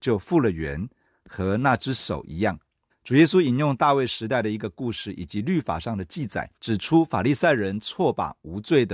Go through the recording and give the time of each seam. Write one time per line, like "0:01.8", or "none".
0:02.9
0:06.6